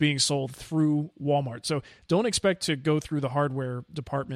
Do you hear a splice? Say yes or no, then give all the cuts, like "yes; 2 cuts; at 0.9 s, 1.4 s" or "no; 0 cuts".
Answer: no; 0 cuts